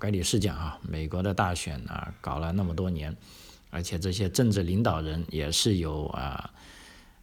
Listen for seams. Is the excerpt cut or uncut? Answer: uncut